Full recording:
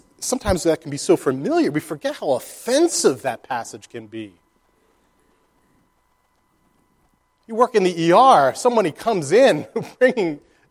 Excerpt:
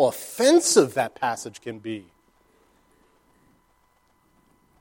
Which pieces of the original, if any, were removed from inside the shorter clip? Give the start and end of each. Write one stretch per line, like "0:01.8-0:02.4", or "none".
none

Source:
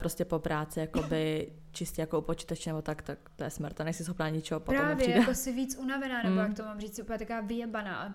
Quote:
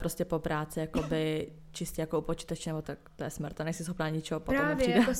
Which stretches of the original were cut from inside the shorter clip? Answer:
0:02.8-0:03.0

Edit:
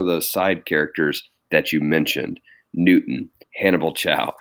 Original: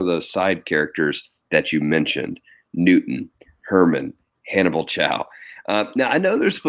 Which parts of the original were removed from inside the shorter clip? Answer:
0:03.4-0:04.3

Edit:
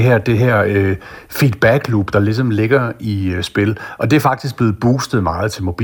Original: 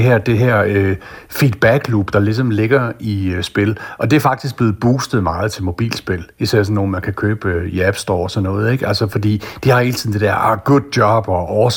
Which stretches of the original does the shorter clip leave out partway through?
none

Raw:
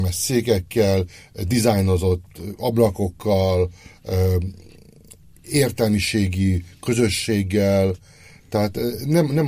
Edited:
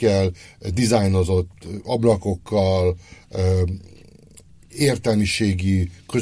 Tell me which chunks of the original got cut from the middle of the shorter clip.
none

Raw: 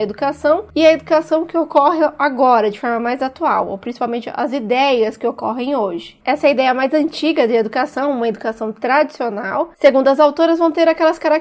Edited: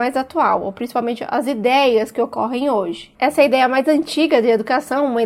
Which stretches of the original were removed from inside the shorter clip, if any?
none

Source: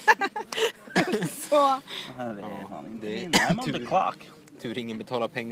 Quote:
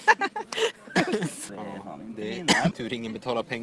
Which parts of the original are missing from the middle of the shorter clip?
0:01.5-0:02.3
0:03.6-0:04.6

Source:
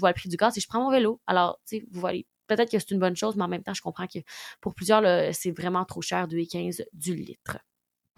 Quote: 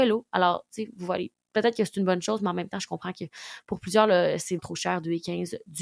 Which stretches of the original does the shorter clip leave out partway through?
0:05.5-0:05.8

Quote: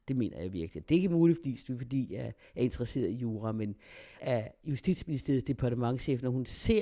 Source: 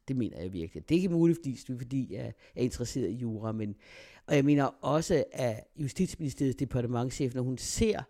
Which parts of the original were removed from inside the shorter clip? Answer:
0:04.2-0:05.3

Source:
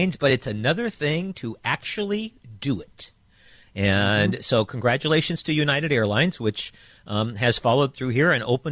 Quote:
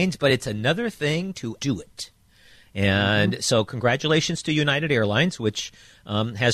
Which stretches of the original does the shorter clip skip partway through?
0:01.6-0:02.6

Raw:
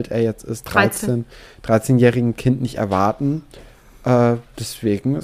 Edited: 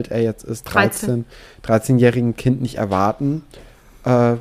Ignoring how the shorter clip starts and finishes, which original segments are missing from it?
none

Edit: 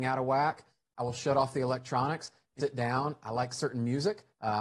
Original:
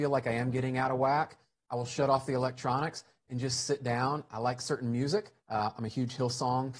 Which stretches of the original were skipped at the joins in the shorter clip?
0:03.3-0:03.7

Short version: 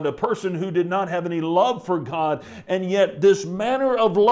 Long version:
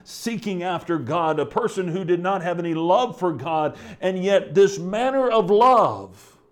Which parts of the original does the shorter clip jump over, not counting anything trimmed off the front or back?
none

